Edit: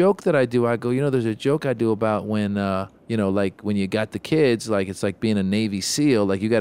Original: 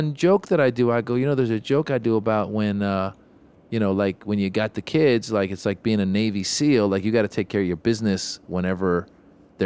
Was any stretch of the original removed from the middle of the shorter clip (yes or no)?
yes